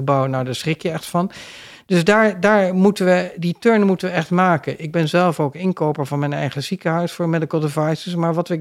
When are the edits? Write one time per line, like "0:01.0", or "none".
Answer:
0:03.4